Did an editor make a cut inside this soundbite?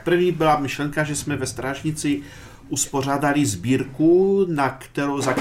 no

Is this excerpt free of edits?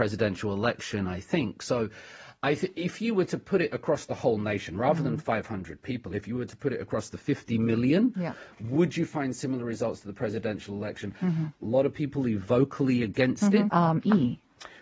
no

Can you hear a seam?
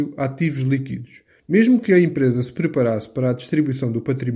yes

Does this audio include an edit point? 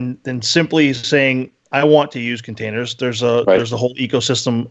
no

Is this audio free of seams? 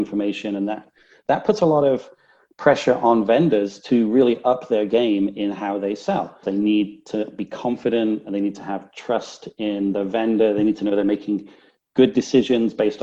no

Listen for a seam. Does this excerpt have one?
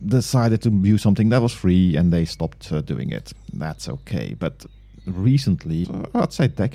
yes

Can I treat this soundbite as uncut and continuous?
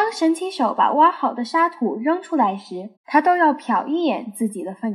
no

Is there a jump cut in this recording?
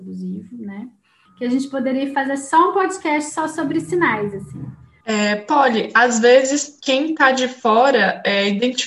yes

